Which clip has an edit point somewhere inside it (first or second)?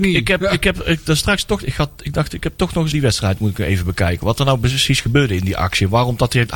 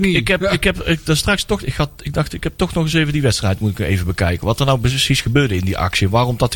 first